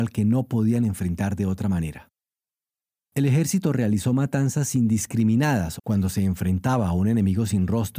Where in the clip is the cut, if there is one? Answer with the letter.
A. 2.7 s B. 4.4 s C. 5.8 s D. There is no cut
C